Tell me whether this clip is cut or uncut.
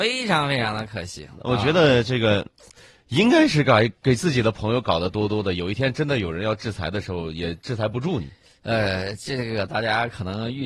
uncut